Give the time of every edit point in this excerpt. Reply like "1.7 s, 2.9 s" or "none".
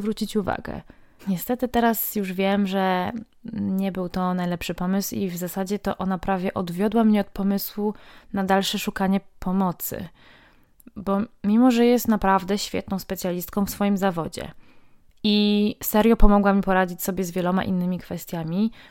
1.2 s